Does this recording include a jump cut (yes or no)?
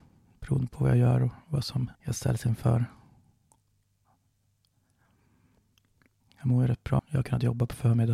yes